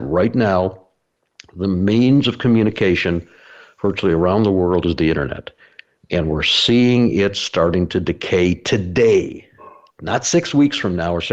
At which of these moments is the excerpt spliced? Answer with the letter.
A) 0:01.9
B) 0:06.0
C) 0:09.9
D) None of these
C